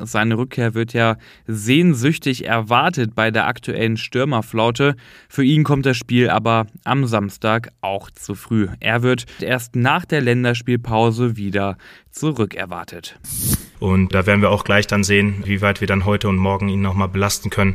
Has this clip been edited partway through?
yes; 2 cuts; at 9.4 s, 13.7 s

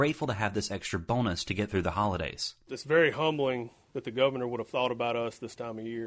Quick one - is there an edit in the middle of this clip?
no; 0 cuts

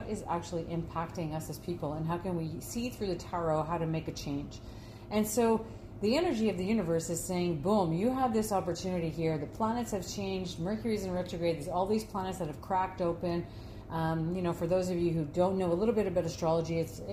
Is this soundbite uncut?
yes; 0 cuts

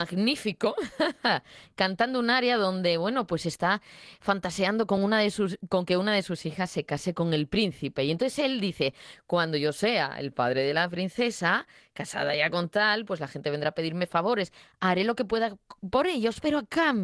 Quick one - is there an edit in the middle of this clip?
no; 0 cuts

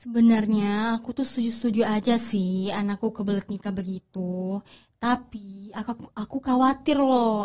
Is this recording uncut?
yes; 0 cuts

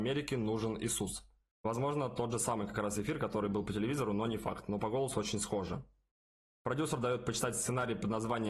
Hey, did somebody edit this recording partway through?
no; 0 cuts

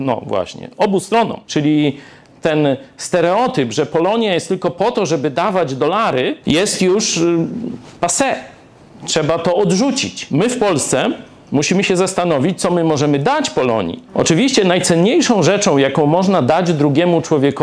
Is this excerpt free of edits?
yes; 0 cuts

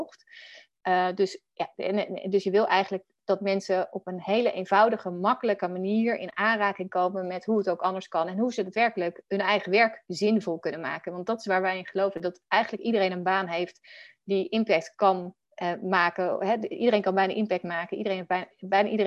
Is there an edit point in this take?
yes; 1 cut; at 15.4 s

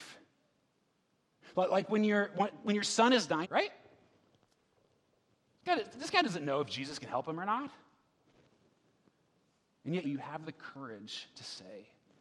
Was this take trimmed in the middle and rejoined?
yes; 2 cuts; at 3.4 s, 10.0 s

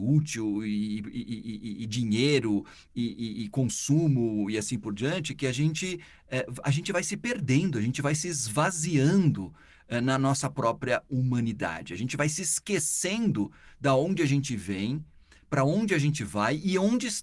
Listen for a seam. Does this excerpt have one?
no; 0 cuts

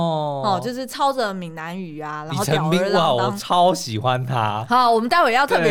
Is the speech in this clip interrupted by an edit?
no; 0 cuts

